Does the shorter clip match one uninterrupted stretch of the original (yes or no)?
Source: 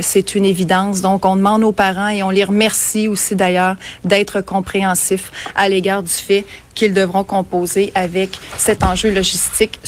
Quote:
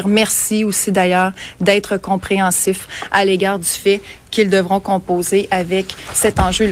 yes